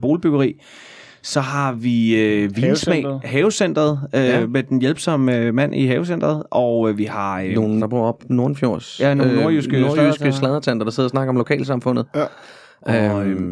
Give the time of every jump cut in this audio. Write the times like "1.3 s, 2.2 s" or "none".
7.8 s